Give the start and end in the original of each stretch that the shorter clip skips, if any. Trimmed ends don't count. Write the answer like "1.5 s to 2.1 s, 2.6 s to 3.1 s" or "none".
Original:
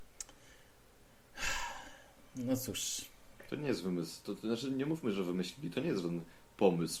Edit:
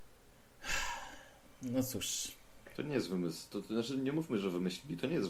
none